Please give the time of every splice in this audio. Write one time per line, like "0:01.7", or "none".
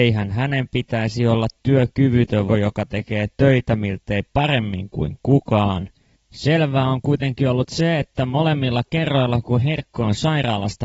0:02.5
0:06.1